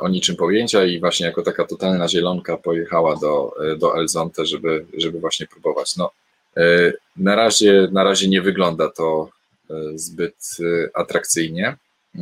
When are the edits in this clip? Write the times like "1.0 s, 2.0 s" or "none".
none